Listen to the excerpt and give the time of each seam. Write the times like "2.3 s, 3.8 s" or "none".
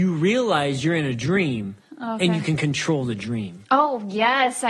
none